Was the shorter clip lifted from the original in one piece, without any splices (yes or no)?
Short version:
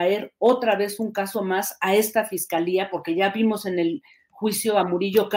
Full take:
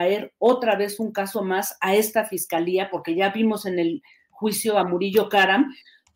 yes